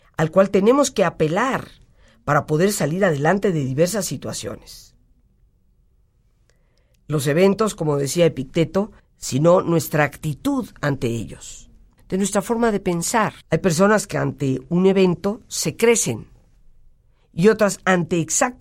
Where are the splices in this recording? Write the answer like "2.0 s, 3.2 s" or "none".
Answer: 9.0 s, 12.0 s, 13.4 s